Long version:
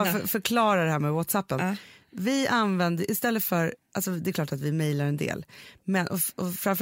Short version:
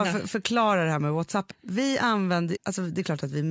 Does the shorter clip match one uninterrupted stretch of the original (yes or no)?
no